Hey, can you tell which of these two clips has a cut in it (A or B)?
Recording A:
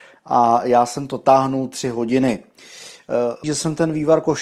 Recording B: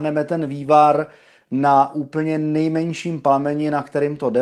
A